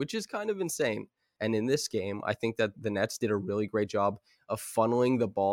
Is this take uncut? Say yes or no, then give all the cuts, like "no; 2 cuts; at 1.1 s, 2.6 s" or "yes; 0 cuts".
no; 2 cuts; at 1.4 s, 2.7 s